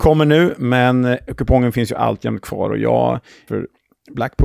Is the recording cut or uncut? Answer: cut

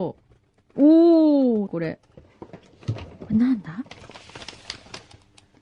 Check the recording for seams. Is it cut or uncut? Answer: cut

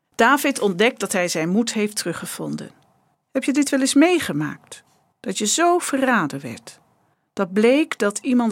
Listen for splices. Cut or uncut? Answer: cut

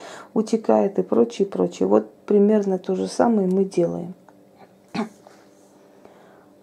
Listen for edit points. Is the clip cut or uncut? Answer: uncut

